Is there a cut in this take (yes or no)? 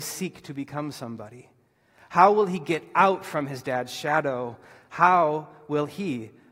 no